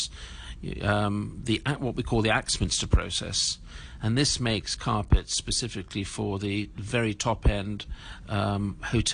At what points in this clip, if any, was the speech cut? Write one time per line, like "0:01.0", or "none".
none